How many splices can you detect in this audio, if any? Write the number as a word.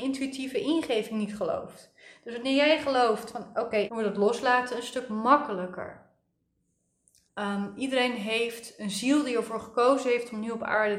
two